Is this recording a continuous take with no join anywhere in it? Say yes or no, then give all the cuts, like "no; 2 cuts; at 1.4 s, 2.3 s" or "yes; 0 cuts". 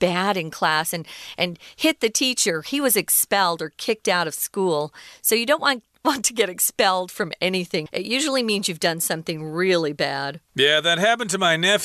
no; 2 cuts; at 7.9 s, 10.5 s